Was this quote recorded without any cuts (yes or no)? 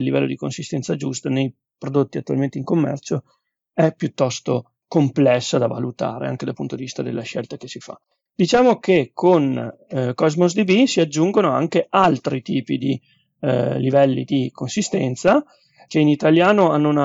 yes